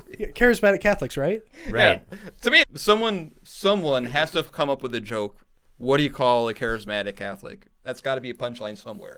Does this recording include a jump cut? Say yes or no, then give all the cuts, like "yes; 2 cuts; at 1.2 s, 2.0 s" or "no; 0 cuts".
yes; 1 cut; at 2.6 s